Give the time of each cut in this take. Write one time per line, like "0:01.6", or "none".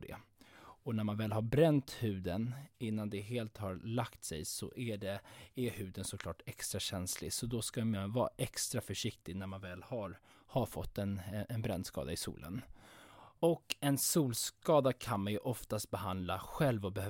none